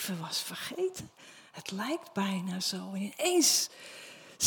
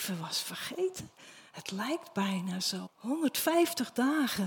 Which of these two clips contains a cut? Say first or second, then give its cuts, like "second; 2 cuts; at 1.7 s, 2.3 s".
second; 1 cut; at 2.9 s